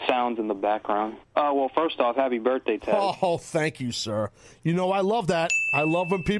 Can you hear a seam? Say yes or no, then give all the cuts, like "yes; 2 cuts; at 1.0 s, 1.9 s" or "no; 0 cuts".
yes; 1 cut; at 1.2 s